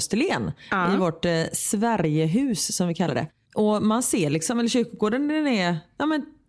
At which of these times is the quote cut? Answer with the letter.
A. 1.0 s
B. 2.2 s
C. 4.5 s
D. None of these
D